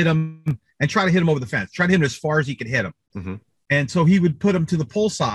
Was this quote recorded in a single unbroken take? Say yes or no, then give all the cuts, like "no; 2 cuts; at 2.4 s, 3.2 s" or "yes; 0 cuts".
yes; 0 cuts